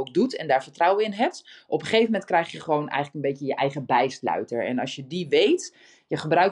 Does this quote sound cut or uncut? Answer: uncut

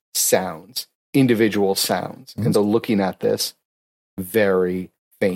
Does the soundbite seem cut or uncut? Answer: cut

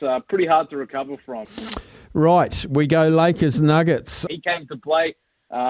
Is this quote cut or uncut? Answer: cut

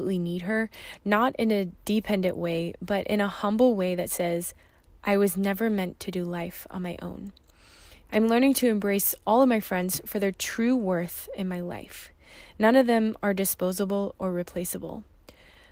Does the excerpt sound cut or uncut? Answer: cut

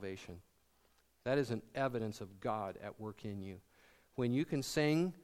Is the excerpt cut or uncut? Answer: uncut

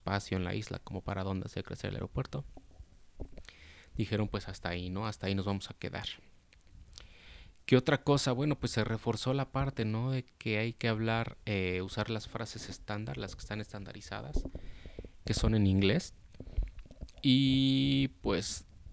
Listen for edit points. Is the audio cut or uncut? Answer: uncut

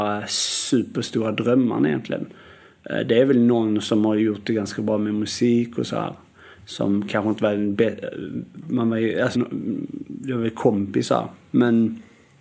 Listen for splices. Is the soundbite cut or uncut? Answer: cut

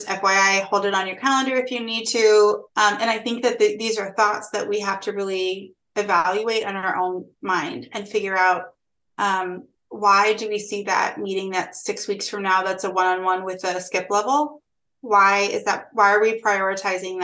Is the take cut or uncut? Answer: cut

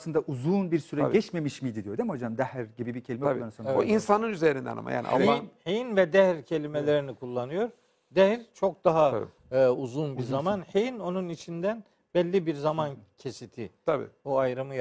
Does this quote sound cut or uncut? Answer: uncut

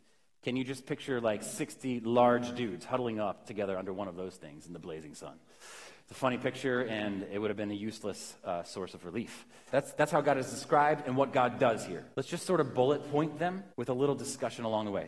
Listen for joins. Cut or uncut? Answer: cut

